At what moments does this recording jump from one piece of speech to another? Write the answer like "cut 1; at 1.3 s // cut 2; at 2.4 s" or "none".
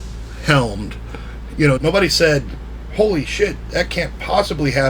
cut 1; at 1.8 s // cut 2; at 2.9 s